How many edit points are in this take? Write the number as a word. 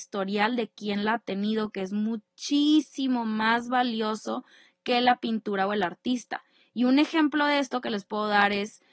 zero